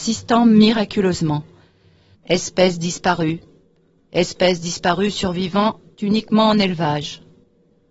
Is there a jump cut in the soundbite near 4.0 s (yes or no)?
no